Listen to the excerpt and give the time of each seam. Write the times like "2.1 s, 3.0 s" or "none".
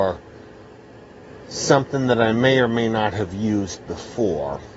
none